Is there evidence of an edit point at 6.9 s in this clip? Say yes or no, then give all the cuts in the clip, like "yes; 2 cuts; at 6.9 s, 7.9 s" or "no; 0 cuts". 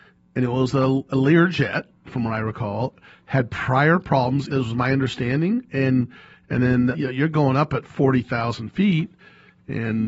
yes; 2 cuts; at 4.5 s, 6.9 s